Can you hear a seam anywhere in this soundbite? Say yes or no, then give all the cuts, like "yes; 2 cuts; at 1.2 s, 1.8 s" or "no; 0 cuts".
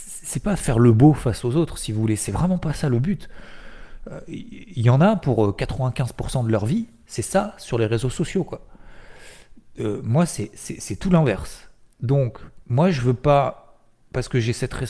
yes; 1 cut; at 12.6 s